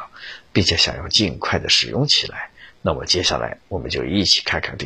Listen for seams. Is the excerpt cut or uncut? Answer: uncut